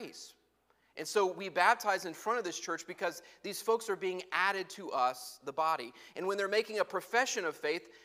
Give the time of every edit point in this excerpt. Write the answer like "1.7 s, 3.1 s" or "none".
none